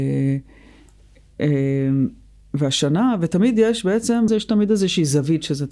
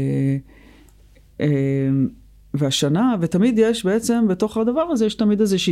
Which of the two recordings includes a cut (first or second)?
first